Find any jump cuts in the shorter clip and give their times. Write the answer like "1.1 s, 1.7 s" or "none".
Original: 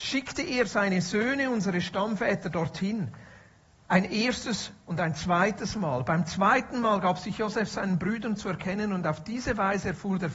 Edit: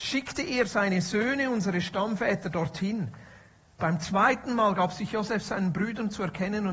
3.8 s